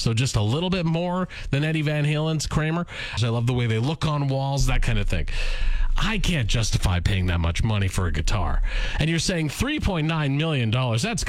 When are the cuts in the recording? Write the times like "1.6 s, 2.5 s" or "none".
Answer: 3.2 s